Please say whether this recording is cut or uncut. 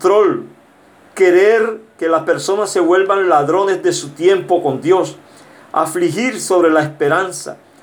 uncut